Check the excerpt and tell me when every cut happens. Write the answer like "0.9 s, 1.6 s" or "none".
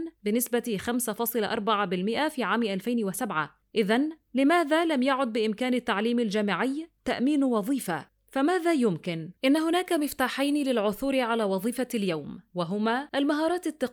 9.4 s